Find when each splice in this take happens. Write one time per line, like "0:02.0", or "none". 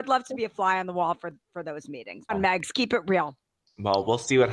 0:02.3